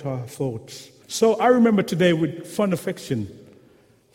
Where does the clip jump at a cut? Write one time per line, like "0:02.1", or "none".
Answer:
0:01.0